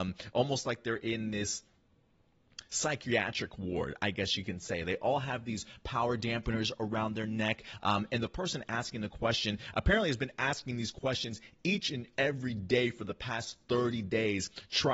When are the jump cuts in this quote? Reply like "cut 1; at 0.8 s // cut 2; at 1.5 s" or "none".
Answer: none